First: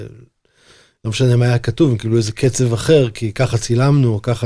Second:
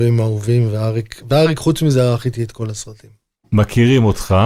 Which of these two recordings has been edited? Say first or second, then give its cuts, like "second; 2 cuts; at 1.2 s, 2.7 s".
second; 1 cut; at 3.4 s